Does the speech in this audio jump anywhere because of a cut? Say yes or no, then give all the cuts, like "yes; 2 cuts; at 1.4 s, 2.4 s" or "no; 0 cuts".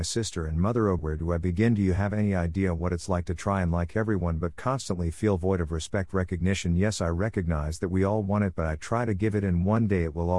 yes; 1 cut; at 1.0 s